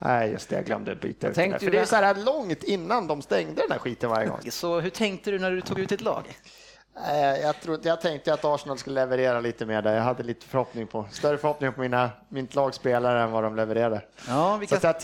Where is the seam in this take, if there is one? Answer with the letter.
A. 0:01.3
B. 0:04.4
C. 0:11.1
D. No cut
B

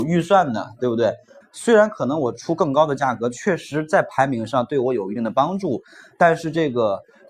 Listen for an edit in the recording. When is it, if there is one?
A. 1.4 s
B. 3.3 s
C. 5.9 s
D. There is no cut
A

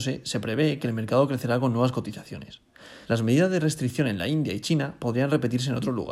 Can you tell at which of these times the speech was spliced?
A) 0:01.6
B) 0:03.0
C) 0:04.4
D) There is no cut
B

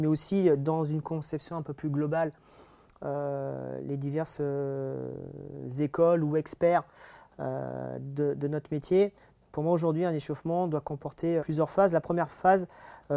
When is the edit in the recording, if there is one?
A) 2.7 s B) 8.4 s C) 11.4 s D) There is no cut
C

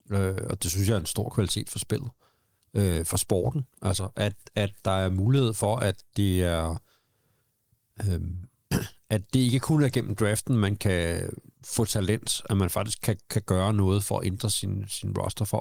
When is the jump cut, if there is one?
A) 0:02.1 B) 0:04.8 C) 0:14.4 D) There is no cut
D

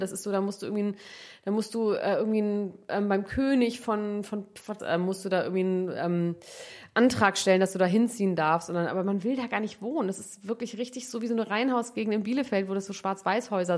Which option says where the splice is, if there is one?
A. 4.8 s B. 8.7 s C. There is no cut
A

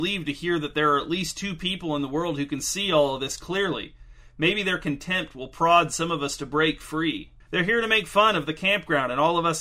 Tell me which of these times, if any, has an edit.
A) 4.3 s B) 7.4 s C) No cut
B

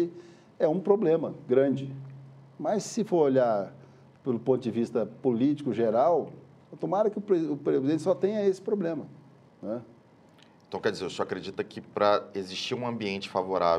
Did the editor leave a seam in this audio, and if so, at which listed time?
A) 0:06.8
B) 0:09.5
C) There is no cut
B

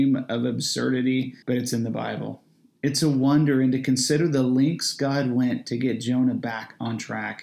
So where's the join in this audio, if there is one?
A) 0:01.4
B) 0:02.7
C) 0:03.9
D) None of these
A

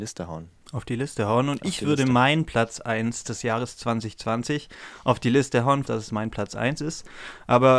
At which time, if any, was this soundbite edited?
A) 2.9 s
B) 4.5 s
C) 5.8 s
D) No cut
C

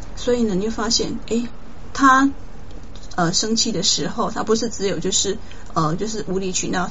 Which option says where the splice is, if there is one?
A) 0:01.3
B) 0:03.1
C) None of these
B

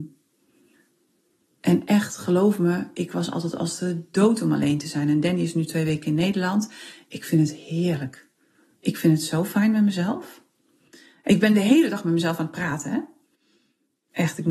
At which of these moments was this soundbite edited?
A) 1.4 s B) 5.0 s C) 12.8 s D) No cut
D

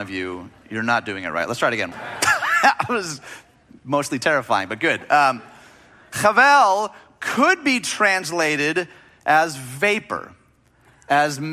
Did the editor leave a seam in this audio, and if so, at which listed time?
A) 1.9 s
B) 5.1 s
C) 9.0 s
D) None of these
A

